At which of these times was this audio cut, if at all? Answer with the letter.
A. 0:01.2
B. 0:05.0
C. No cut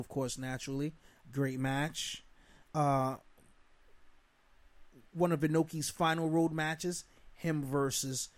A